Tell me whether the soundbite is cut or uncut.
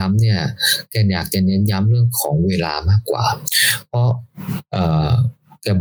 uncut